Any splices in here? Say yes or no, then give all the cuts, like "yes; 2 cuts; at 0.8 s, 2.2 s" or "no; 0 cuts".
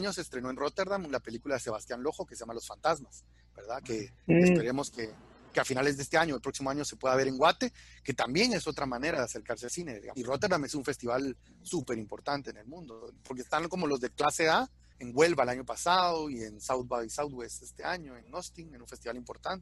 yes; 1 cut; at 14.9 s